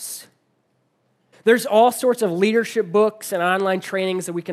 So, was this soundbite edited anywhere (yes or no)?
yes